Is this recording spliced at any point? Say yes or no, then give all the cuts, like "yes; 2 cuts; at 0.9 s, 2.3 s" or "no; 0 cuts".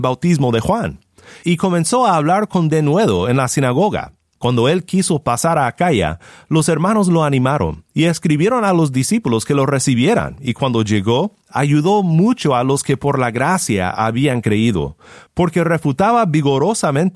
yes; 1 cut; at 4.4 s